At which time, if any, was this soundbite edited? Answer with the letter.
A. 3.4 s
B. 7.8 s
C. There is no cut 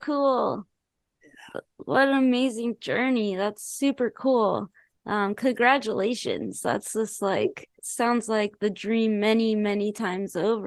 B